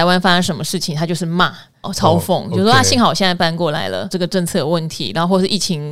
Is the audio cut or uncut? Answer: cut